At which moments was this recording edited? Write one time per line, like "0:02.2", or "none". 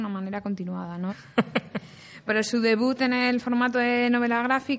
0:01.1
0:02.3